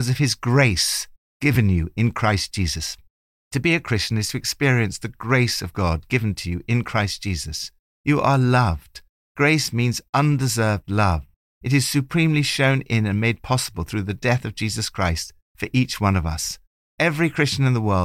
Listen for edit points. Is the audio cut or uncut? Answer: uncut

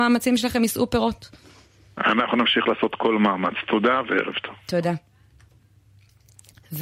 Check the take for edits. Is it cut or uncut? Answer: uncut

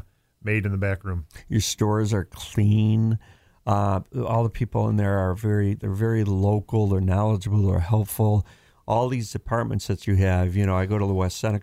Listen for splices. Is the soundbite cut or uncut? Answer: uncut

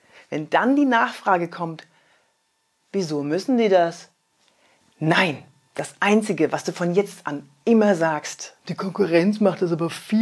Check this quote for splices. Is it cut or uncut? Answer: cut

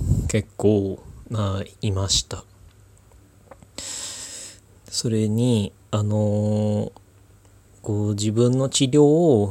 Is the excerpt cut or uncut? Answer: uncut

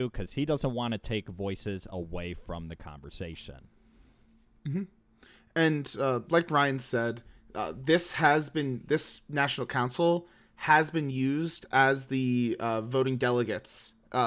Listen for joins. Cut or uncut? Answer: uncut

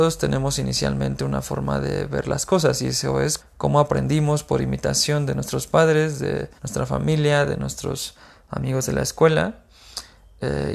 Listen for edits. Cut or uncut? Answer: cut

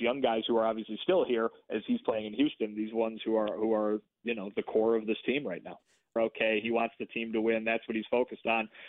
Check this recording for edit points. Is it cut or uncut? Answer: cut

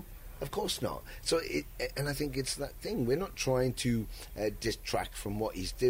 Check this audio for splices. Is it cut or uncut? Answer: uncut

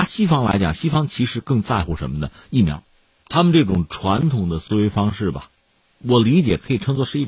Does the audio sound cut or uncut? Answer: uncut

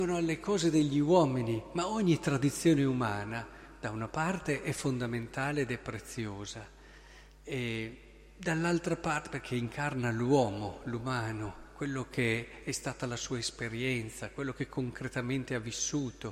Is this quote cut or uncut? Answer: uncut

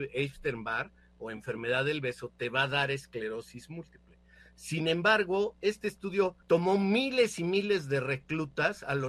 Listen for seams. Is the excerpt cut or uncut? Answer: cut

